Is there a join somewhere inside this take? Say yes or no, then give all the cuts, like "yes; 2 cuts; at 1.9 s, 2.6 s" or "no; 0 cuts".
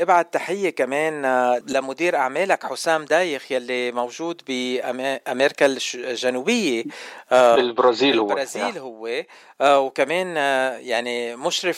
yes; 1 cut; at 1.6 s